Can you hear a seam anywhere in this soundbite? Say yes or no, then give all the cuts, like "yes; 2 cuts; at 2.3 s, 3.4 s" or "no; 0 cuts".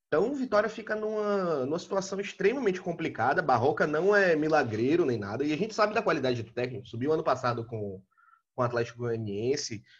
no; 0 cuts